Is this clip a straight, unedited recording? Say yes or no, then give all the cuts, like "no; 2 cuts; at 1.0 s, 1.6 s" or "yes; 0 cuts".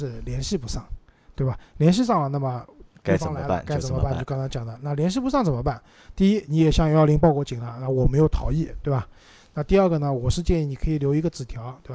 yes; 0 cuts